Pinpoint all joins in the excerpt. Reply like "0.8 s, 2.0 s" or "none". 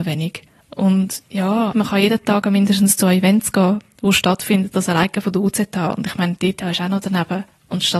1.7 s